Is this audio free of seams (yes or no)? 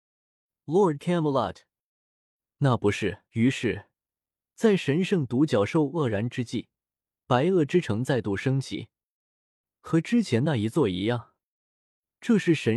no